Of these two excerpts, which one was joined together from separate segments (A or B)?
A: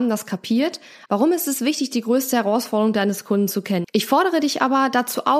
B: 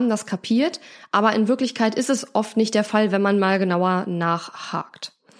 A